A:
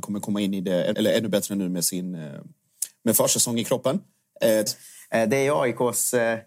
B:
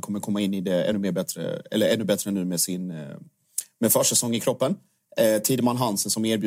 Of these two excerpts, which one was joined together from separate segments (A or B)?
A